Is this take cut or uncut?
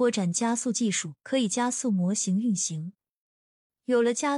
cut